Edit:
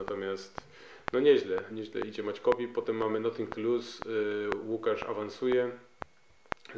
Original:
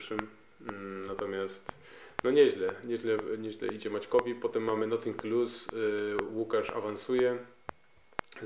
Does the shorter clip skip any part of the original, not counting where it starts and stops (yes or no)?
yes